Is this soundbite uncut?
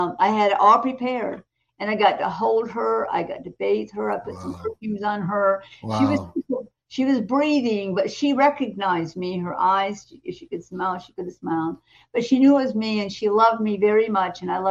yes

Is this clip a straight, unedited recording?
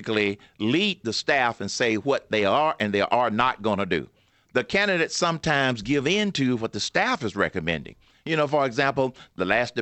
yes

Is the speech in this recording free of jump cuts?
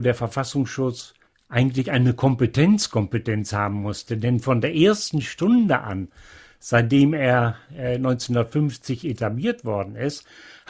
yes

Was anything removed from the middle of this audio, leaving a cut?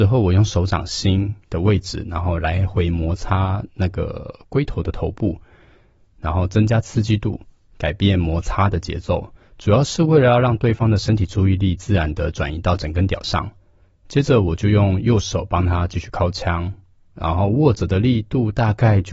no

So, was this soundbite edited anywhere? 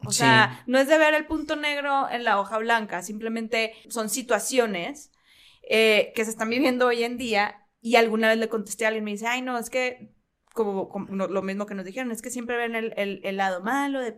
yes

